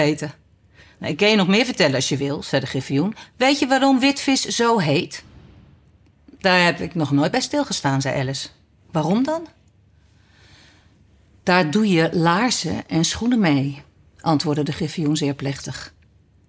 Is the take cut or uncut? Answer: uncut